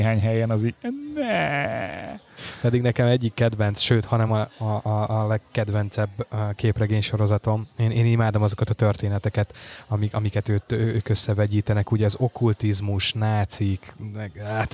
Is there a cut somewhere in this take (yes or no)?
no